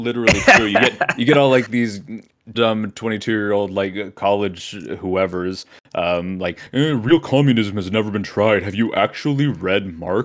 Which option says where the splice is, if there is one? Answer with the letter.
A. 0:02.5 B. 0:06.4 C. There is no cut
A